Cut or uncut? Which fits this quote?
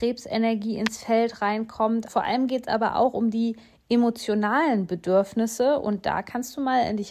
cut